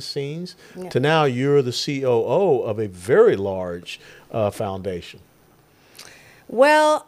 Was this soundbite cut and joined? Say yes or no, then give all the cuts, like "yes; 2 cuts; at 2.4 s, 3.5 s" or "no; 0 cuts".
no; 0 cuts